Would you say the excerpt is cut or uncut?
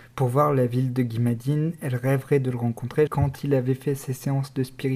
cut